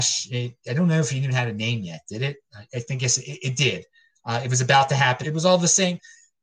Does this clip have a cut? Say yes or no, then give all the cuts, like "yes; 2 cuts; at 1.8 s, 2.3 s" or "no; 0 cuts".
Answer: yes; 1 cut; at 5.2 s